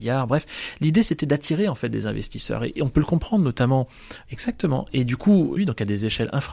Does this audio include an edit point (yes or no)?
yes